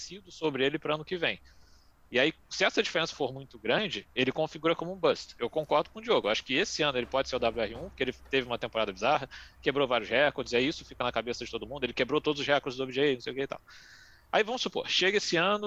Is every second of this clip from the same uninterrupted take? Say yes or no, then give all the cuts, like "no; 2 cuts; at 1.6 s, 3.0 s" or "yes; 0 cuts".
yes; 0 cuts